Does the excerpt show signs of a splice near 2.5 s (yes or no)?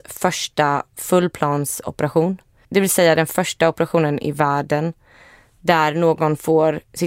no